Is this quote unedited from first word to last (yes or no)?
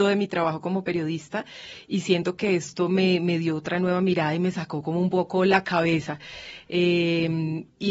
yes